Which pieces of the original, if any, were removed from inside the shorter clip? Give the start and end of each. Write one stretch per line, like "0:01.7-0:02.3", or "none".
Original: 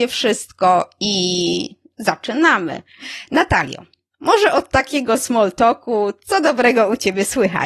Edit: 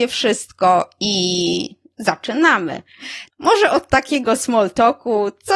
0:03.3-0:04.1